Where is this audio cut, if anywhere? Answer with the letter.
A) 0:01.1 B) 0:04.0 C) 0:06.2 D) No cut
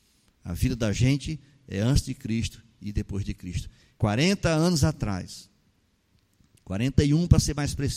B